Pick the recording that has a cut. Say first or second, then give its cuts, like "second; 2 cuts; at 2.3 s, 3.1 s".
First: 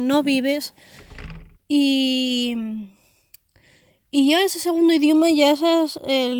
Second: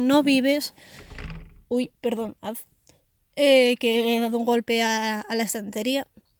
first; 1 cut; at 1.5 s